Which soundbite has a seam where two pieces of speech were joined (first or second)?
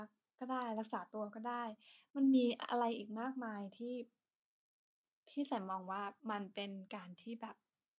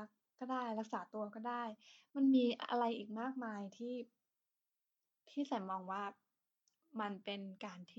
first